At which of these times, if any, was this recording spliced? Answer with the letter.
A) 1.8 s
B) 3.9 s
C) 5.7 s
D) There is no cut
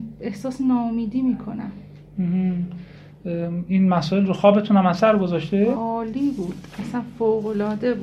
C